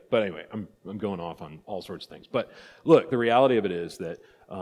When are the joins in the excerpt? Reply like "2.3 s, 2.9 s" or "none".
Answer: none